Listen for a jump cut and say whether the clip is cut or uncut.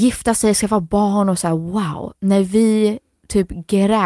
uncut